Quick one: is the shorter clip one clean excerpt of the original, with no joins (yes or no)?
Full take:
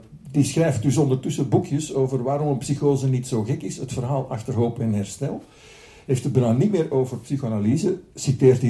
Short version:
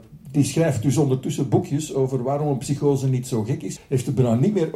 no